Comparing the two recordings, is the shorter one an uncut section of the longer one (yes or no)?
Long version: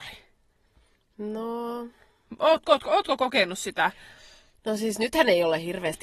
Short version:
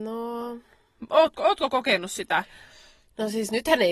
no